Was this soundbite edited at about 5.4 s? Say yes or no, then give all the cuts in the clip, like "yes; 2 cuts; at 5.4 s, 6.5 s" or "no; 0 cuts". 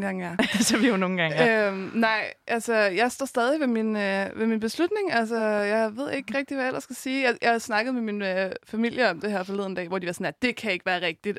no; 0 cuts